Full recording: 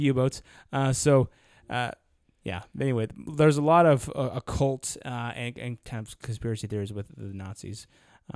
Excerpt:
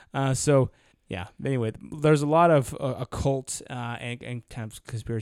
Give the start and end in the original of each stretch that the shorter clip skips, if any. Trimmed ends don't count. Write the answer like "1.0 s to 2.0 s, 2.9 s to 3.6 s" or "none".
1.5 s to 2.3 s